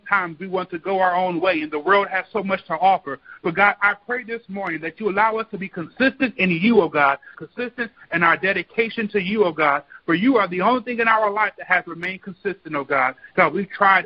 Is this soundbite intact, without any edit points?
no; 1 cut; at 7.3 s

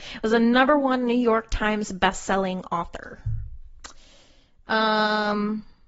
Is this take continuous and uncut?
yes; 0 cuts

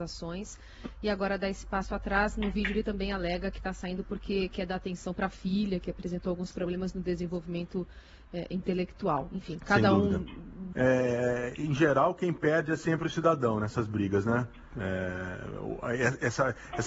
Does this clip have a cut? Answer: yes; 1 cut; at 10.7 s

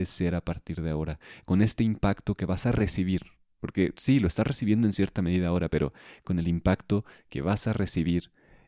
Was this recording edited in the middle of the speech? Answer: no; 0 cuts

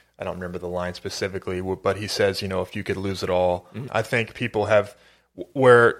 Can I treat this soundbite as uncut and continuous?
no; 1 cut; at 3.9 s

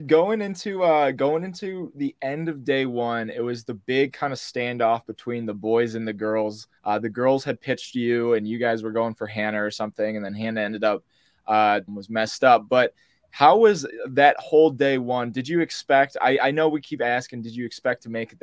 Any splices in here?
yes; 2 cuts; at 6.8 s, 11.9 s

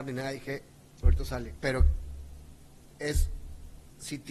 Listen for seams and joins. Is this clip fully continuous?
no; 1 cut; at 1.6 s

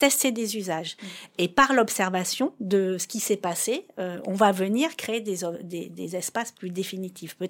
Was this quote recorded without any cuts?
yes; 0 cuts

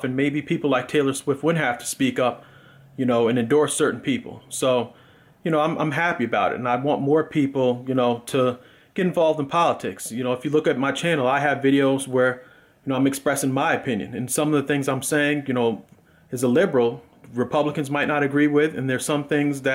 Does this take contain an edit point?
no; 0 cuts

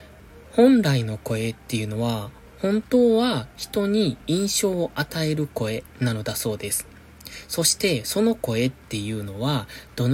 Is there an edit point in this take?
yes; 1 cut; at 4.2 s

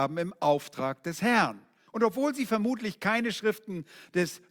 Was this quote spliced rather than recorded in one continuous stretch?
yes; 1 cut; at 1.9 s

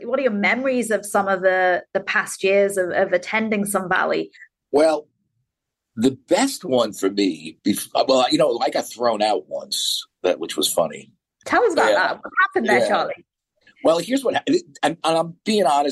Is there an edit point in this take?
no; 0 cuts

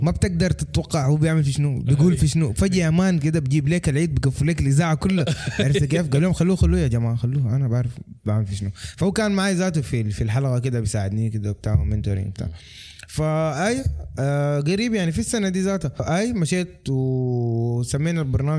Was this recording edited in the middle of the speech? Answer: no; 0 cuts

